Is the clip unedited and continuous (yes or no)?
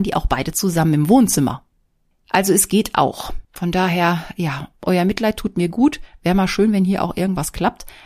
no